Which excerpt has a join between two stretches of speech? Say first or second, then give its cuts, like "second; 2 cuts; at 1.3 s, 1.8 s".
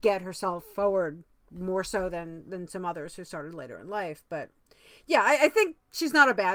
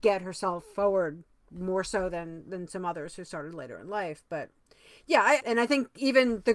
second; 1 cut; at 5.4 s